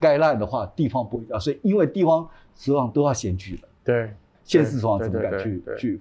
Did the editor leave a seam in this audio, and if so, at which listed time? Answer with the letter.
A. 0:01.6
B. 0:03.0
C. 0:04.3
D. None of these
C